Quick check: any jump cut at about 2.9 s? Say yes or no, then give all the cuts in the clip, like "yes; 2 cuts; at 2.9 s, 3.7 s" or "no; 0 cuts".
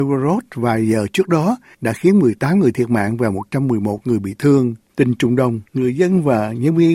no; 1 cut; at 4.9 s